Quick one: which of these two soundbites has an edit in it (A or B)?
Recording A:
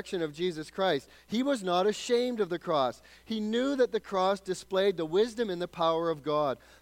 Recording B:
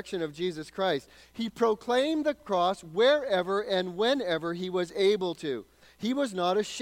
A